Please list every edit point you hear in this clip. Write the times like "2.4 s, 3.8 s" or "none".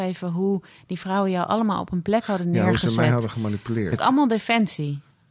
3.9 s